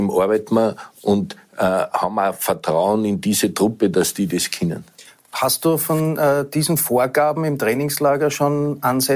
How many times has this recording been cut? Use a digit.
0